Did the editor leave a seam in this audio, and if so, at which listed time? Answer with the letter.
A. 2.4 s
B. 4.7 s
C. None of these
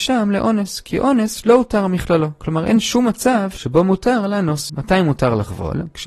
B